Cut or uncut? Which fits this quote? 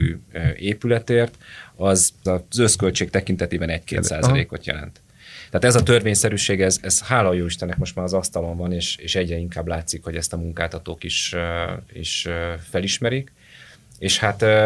cut